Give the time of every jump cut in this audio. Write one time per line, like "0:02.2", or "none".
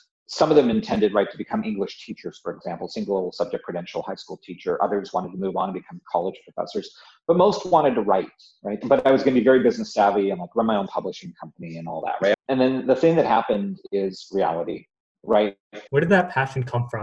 0:08.8
0:12.3
0:15.9